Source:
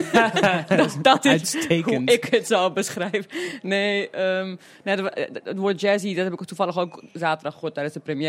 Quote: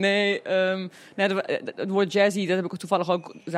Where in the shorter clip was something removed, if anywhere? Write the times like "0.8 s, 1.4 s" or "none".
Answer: none